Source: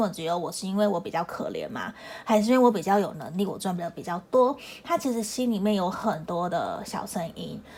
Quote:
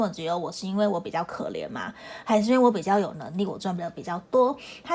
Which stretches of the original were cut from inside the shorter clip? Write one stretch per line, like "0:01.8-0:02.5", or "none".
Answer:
none